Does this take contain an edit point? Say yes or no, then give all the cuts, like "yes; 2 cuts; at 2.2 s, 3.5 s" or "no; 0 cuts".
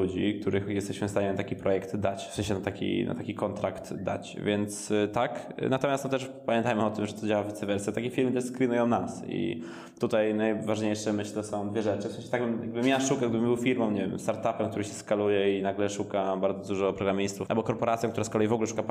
yes; 1 cut; at 17.5 s